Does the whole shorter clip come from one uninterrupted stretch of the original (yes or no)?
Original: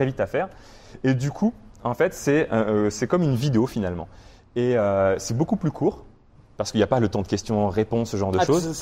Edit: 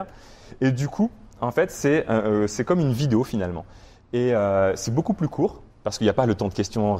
no